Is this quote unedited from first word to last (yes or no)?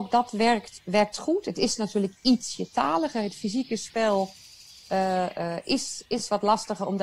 yes